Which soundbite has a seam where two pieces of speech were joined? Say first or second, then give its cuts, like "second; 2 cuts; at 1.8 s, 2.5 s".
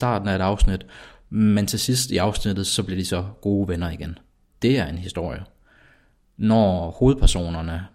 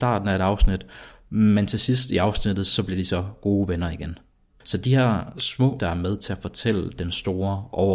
second; 2 cuts; at 4.6 s, 5.8 s